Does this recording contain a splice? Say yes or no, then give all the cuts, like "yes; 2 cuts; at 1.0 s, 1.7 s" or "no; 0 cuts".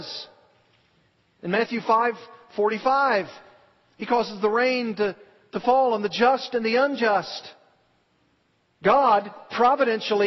no; 0 cuts